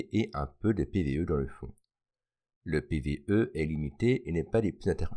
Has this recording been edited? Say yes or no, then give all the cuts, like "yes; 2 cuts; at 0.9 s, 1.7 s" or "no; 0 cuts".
no; 0 cuts